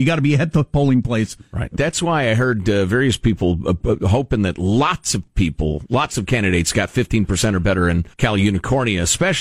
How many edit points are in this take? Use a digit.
2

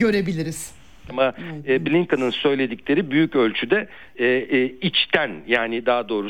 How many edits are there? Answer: 1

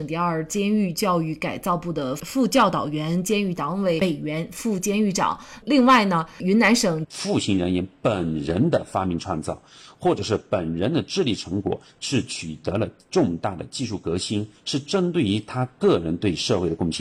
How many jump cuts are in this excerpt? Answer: 1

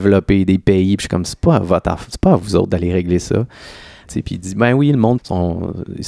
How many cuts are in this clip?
2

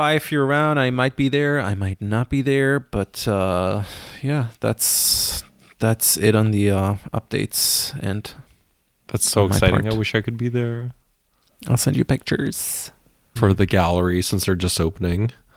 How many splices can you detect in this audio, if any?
1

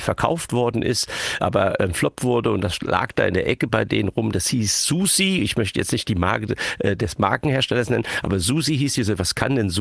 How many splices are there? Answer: 0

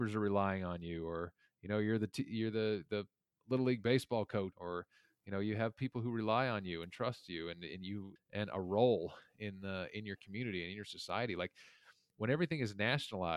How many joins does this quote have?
2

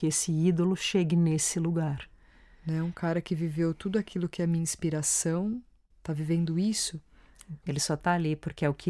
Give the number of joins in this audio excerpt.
1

